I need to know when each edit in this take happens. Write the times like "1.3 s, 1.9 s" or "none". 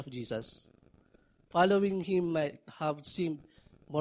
none

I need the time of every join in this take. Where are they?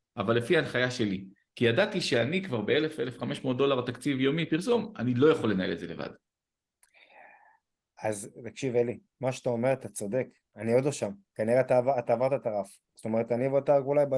none

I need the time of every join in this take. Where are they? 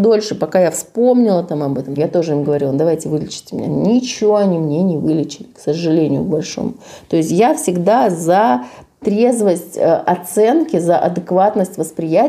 2.0 s

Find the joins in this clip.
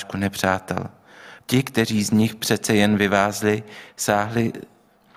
1.4 s

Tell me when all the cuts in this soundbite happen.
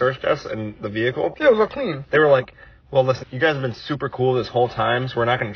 3.2 s

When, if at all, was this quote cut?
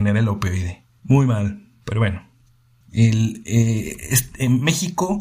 1.0 s, 2.8 s

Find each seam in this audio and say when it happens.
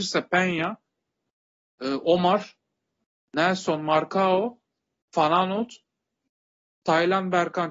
none

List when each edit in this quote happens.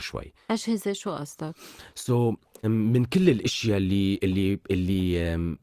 2.6 s

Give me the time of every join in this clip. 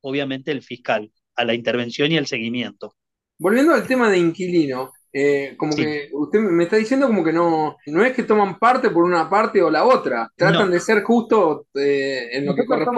7.9 s, 10.4 s

